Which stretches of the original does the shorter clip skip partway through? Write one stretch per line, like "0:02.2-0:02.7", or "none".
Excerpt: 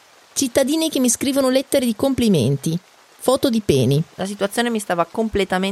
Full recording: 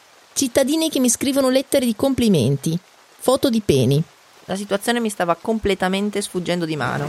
0:04.1-0:04.4